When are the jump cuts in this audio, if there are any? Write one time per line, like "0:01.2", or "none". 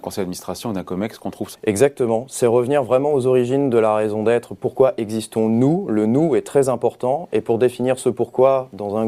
0:01.5